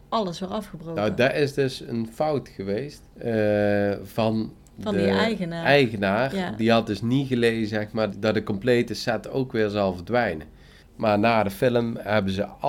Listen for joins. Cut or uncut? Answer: cut